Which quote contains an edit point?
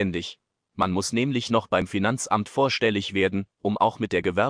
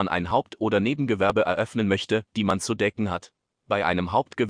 second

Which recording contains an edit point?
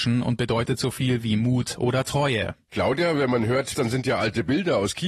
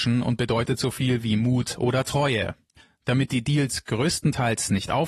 first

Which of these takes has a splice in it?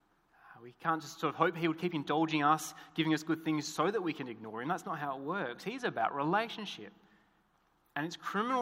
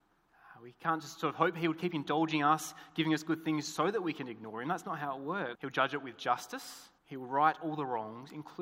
second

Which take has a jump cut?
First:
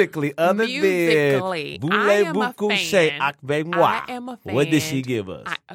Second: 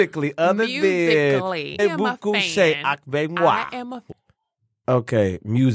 second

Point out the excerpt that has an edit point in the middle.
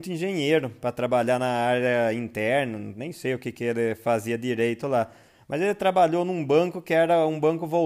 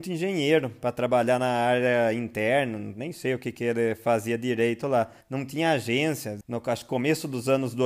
second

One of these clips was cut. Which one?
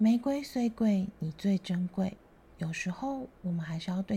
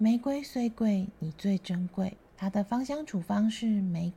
second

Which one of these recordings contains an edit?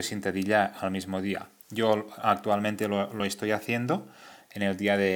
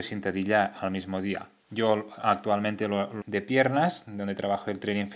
second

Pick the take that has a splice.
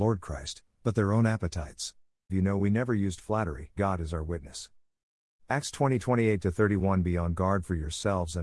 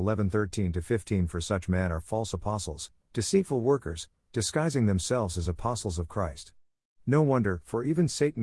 first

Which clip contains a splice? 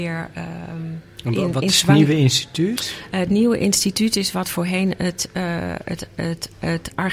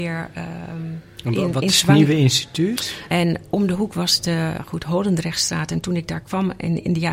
second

